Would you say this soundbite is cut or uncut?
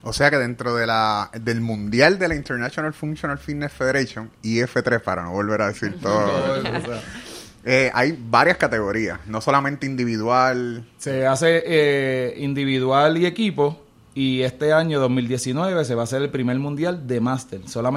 uncut